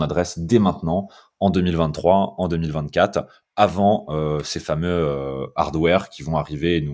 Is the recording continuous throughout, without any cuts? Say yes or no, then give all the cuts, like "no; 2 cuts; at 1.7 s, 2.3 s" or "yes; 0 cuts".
yes; 0 cuts